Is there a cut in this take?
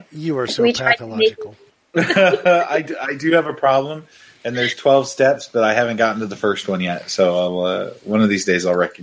no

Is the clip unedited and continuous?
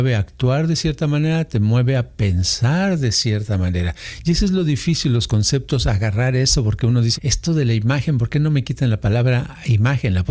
no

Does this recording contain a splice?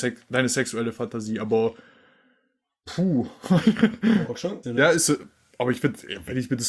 yes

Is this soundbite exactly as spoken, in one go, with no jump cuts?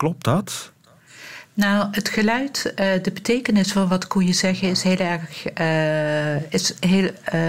yes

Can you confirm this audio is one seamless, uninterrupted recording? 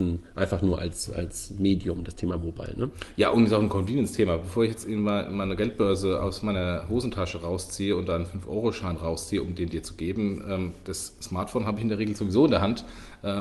yes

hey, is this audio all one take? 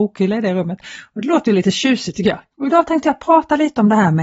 no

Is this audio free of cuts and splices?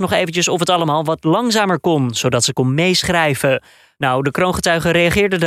yes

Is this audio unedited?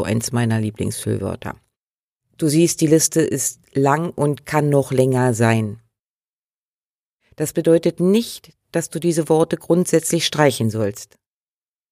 yes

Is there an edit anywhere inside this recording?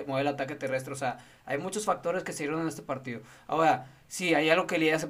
no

